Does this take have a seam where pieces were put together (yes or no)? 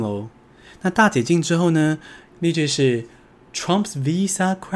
yes